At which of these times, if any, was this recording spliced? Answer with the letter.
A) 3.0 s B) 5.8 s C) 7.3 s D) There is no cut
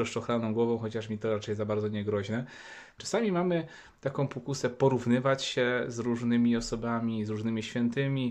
A